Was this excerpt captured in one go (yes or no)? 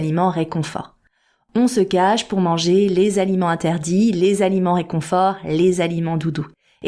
yes